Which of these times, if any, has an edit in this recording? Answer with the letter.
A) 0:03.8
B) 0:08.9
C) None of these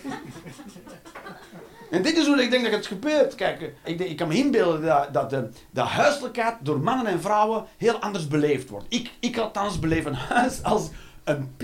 A